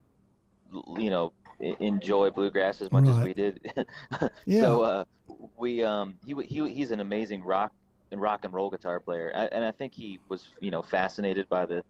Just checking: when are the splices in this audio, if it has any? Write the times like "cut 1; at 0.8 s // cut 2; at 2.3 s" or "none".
none